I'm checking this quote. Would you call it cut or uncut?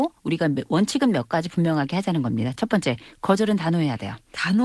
uncut